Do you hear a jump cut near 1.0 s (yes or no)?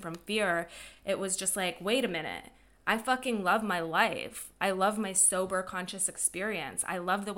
no